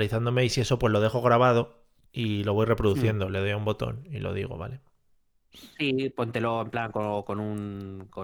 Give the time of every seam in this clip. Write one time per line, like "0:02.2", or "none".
none

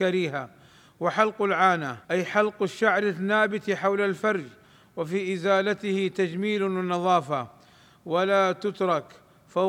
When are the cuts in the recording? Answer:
0:02.0

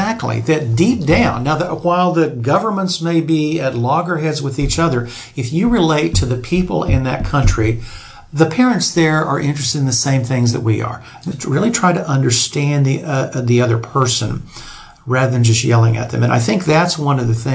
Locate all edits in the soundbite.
0:11.3

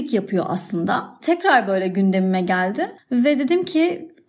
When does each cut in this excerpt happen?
0:01.2

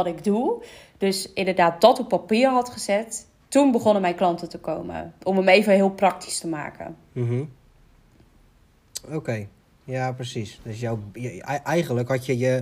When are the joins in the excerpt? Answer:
none

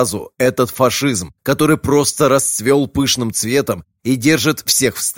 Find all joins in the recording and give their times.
none

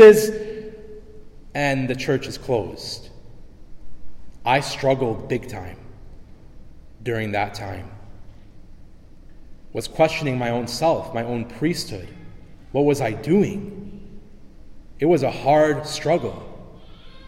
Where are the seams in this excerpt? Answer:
none

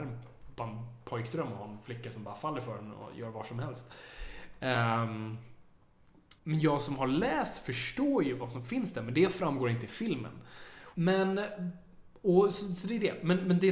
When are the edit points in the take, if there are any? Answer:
0:06.4
0:10.9

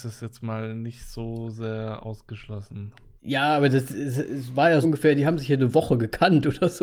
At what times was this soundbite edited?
0:03.2
0:04.8

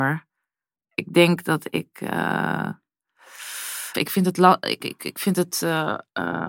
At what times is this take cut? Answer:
0:03.9

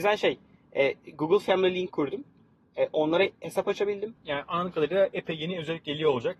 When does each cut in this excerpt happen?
0:04.2

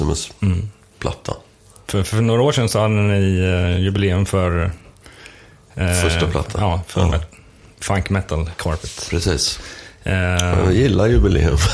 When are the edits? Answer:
none

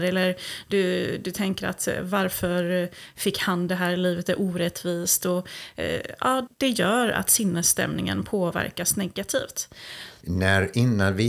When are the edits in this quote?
0:06.5
0:10.2

